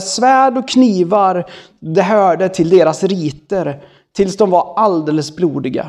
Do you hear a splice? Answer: no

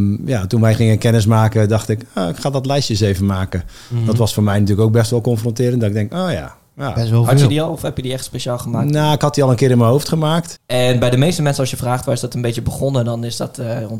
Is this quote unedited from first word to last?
no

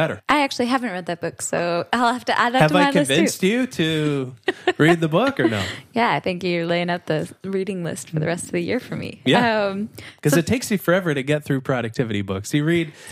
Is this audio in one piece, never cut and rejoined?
yes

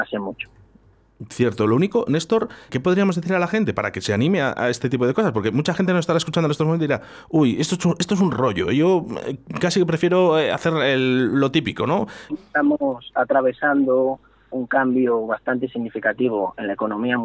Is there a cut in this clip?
yes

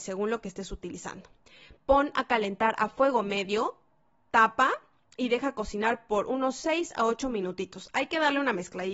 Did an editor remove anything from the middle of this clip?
no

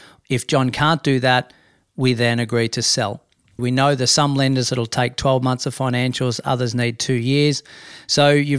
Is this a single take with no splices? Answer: no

